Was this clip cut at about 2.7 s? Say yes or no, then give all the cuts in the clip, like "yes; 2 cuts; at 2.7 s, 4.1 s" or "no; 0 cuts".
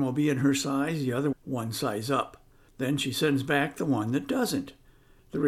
yes; 2 cuts; at 1.3 s, 2.7 s